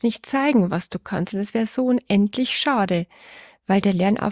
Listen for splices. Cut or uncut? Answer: uncut